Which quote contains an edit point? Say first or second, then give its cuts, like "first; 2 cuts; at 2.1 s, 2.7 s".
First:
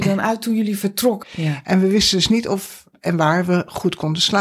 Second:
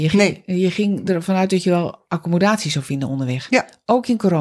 first; 1 cut; at 1.2 s